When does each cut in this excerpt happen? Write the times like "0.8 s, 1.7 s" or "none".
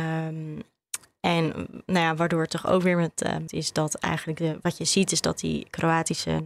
3.5 s